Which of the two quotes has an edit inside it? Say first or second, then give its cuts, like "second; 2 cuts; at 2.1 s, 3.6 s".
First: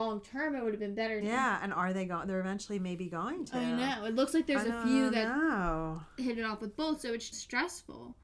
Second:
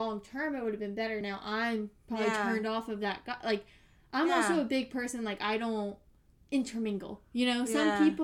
first; 2 cuts; at 1.2 s, 7.3 s